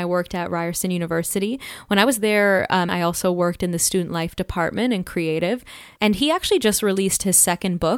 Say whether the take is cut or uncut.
cut